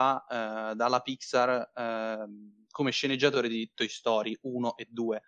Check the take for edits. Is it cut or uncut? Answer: uncut